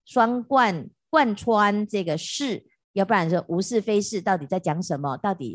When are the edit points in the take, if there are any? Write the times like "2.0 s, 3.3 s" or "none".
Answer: 2.8 s